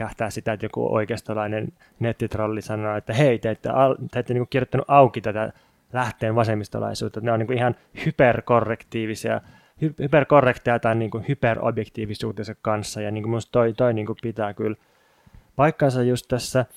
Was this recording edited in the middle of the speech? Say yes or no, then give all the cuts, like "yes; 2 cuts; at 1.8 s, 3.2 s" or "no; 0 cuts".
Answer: no; 0 cuts